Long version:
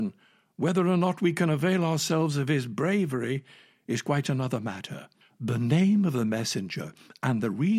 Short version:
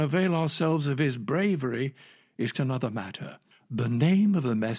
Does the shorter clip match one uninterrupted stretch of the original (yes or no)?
no